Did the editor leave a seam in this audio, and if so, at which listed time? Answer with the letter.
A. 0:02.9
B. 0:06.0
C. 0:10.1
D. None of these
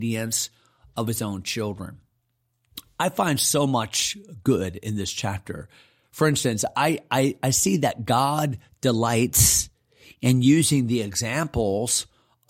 D